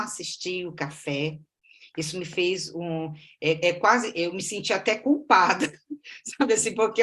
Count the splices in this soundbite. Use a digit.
0